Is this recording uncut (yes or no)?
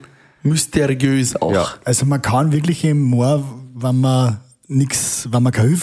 yes